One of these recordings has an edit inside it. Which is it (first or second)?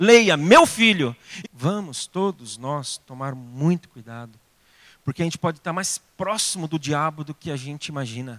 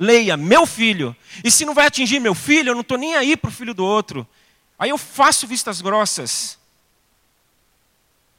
first